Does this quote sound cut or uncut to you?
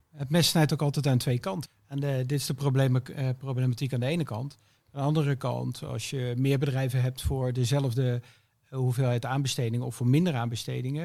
cut